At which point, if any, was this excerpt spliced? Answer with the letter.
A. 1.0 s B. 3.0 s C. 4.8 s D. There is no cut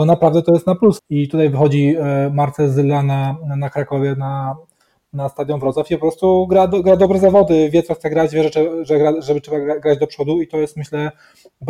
A